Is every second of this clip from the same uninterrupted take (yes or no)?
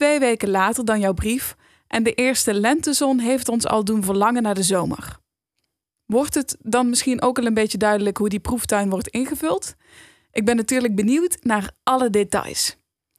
yes